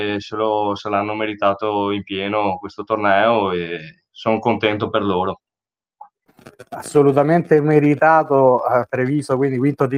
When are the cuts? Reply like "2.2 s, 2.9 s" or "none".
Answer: none

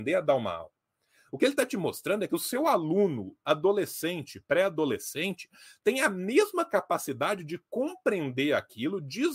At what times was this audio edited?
none

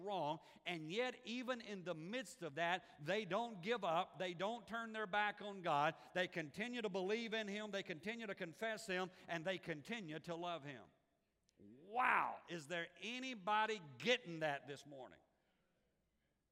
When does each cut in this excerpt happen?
none

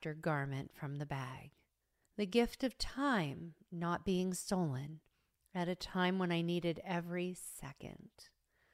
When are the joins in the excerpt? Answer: 2.0 s

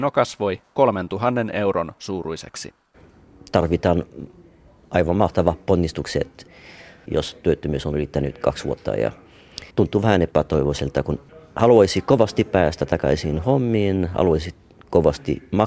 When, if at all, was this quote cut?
7.1 s, 9.7 s

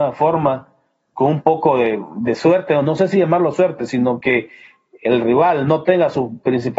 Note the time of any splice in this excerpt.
none

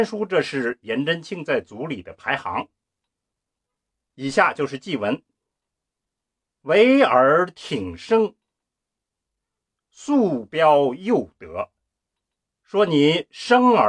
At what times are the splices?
4.1 s

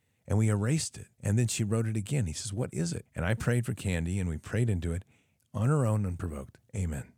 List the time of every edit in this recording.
1.1 s, 3.1 s, 5.4 s

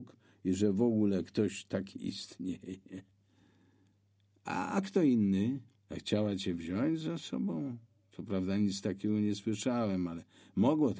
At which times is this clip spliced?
5.7 s

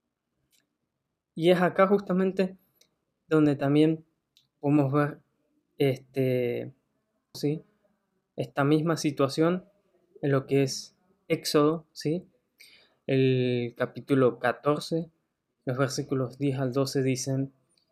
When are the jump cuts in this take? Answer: 7.3 s

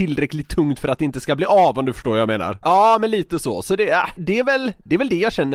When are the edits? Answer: 2.6 s, 4.2 s

